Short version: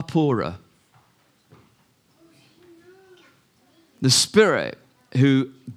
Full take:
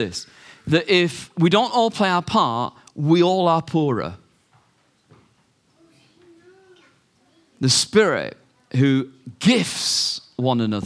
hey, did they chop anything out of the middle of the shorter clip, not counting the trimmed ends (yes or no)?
no